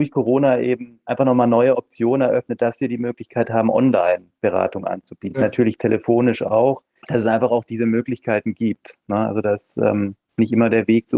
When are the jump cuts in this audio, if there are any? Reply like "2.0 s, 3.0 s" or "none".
none